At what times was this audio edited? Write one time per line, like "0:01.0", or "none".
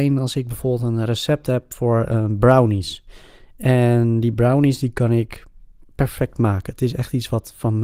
none